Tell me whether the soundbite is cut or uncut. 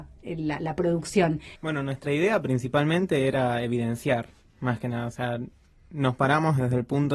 cut